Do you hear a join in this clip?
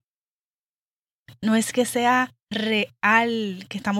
yes; 2 cuts; at 1.2 s, 2.4 s

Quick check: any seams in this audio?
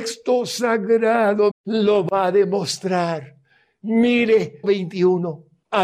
yes; 2 cuts; at 1.5 s, 4.6 s

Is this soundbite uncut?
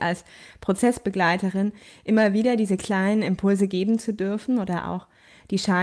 yes; 0 cuts

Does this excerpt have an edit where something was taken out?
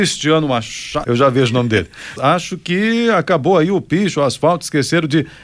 yes; 2 cuts; at 1.0 s, 2.2 s

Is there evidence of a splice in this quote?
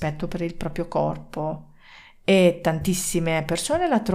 no; 0 cuts

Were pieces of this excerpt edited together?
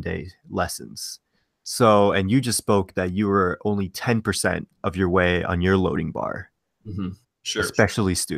yes; 1 cut; at 7.2 s

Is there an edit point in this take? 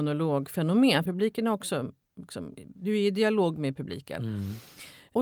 yes; 1 cut; at 1.1 s

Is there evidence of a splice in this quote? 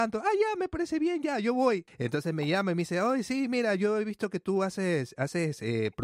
yes; 1 cut; at 1.9 s

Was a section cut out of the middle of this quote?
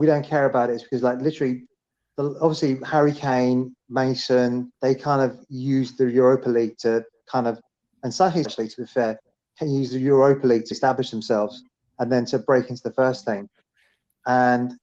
yes; 3 cuts; at 4.7 s, 8.4 s, 10.7 s

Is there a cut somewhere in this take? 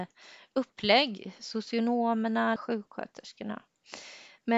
yes; 1 cut; at 2.6 s

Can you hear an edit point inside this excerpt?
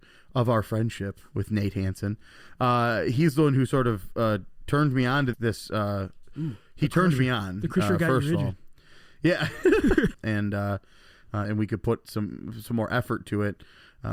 yes; 3 cuts; at 5.3 s, 10.1 s, 11.4 s

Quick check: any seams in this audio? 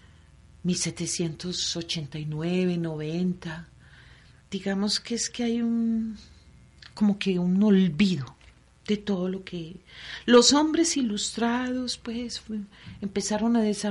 no; 0 cuts

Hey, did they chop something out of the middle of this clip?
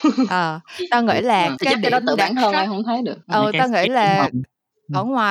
yes; 2 cuts; at 1.6 s, 3.2 s

